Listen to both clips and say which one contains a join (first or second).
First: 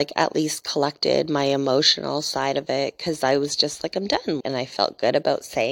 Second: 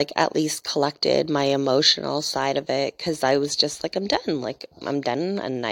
first